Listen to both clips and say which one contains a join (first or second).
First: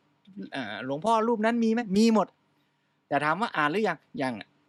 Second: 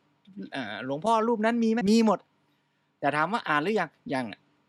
second